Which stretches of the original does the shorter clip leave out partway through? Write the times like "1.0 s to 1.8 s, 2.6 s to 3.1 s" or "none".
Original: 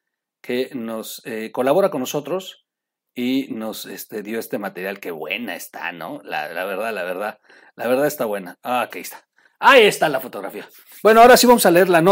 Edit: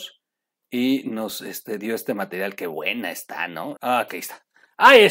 6.2 s to 8.6 s